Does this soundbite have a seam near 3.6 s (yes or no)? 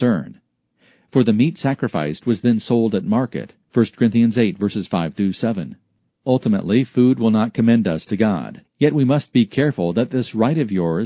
yes